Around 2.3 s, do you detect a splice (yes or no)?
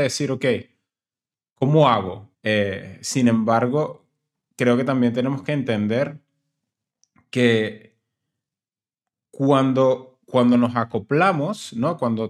yes